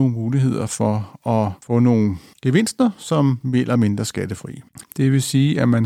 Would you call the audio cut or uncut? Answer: cut